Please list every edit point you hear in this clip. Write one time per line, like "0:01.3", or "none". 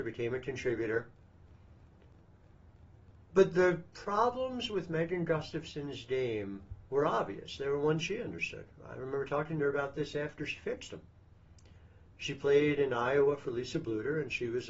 0:08.0